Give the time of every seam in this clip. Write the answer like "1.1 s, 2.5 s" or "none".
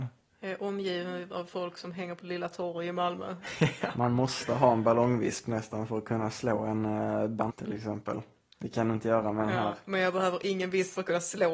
7.5 s

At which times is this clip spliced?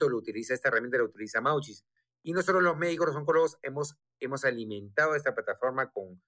none

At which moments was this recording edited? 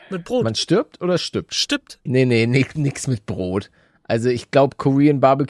2.1 s

